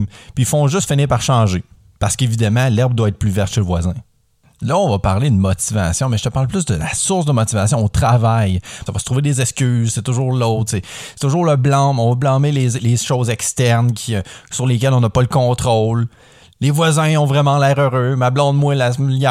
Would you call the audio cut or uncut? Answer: cut